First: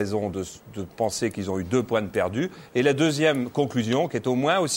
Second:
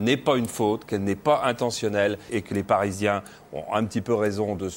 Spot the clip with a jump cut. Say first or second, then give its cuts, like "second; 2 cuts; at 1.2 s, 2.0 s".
second; 1 cut; at 2.3 s